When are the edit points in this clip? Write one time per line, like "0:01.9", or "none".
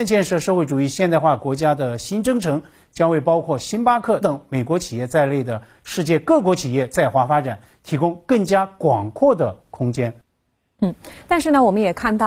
0:04.2